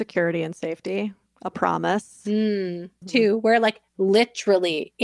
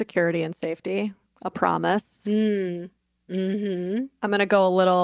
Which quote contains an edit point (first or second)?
first